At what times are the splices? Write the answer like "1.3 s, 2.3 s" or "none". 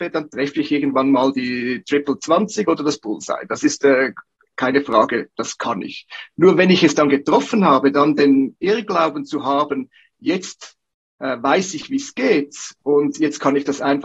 none